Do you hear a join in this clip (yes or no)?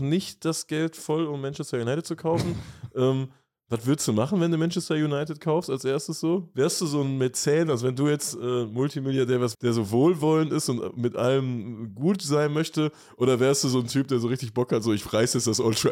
yes